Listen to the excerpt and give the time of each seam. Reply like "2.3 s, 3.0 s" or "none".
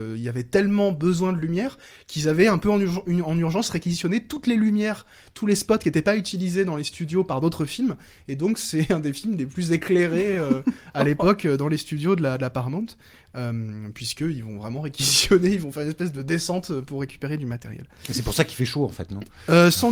none